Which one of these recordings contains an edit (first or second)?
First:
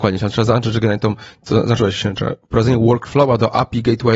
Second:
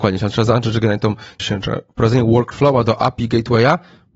second